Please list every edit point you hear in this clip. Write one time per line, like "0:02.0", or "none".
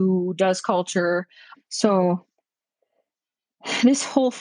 0:01.5